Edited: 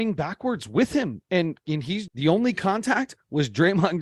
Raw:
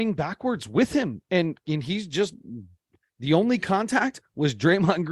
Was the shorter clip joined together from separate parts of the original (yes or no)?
yes